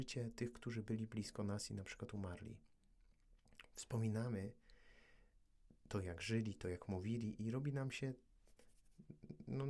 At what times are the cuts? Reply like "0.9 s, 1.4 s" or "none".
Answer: none